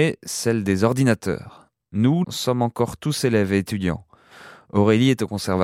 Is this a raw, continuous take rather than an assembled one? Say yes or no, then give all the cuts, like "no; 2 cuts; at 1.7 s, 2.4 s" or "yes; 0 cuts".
no; 1 cut; at 2.2 s